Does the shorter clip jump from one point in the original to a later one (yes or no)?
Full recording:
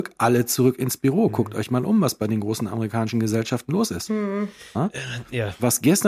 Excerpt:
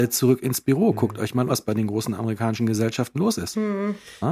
yes